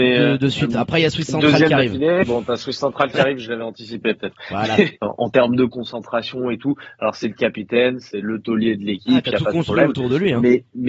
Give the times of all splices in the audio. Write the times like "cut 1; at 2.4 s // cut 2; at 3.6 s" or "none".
cut 1; at 5.0 s